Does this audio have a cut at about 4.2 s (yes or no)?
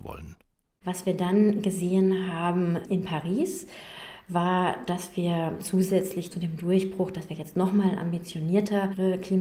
no